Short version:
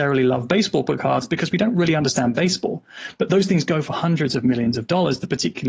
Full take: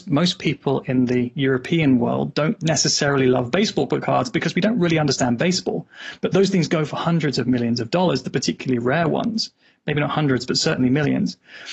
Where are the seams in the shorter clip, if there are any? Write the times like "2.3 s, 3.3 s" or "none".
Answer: none